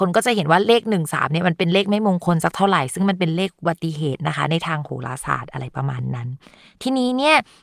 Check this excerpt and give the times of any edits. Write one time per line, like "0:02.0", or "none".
none